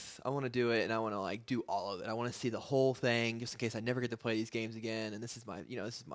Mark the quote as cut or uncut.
uncut